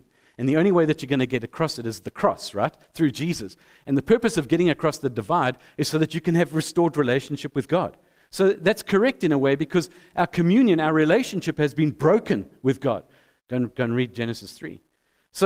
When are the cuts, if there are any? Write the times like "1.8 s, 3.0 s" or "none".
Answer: 13.4 s

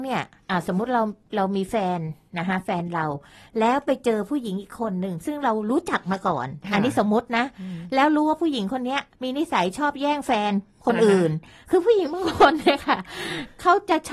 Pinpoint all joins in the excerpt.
none

